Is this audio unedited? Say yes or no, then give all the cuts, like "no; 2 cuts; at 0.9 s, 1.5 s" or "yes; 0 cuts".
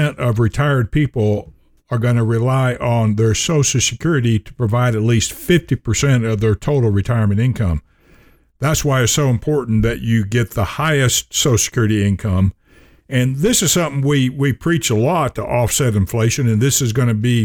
yes; 0 cuts